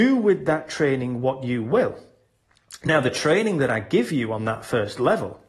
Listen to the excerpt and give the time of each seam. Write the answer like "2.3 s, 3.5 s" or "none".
none